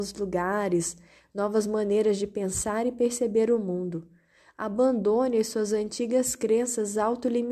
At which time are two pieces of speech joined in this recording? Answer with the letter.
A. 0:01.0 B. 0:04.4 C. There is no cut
C